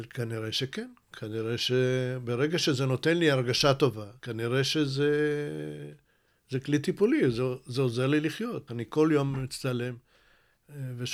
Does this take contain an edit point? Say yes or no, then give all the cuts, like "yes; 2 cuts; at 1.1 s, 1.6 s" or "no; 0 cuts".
yes; 2 cuts; at 4.2 s, 8.7 s